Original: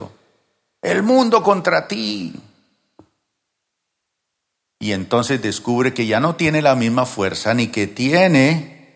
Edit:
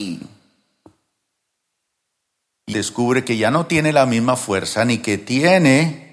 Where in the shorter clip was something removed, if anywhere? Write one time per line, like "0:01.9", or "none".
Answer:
0:02.7